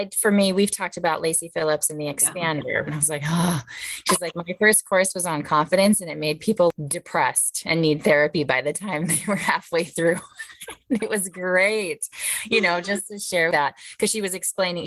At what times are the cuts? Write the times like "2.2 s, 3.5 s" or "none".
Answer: 2.8 s